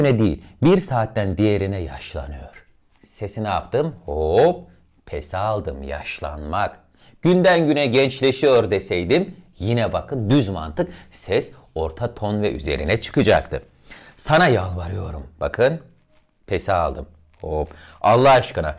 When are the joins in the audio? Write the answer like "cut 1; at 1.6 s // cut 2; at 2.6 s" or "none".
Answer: none